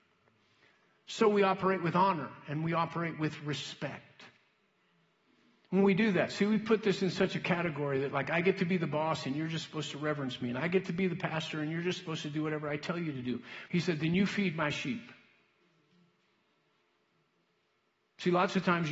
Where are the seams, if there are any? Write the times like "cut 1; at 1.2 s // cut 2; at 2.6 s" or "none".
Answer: cut 1; at 13.7 s

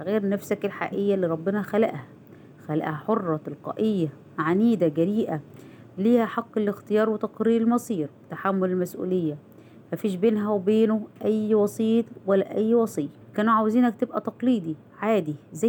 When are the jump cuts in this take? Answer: cut 1; at 13.2 s

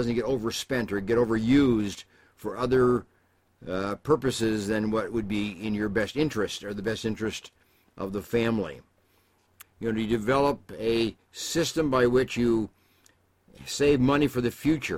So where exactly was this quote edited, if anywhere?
cut 1; at 9.6 s

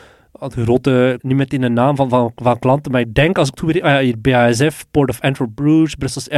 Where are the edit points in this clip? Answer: cut 1; at 1.2 s

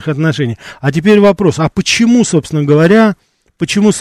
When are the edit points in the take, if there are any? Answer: none

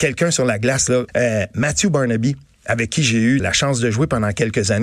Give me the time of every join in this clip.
cut 1; at 1.1 s // cut 2; at 3.4 s

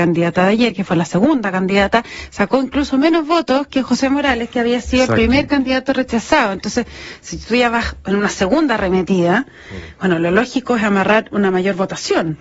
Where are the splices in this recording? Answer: none

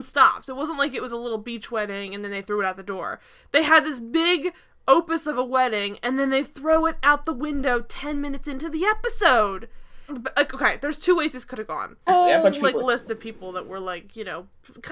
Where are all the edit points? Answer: cut 1; at 10.1 s // cut 2; at 12.1 s

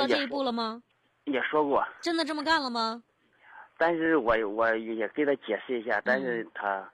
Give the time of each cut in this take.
none

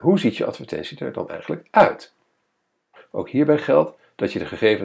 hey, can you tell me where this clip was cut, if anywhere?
cut 1; at 3.0 s

